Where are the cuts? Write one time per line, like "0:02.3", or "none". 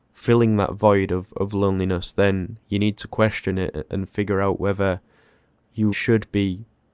0:05.9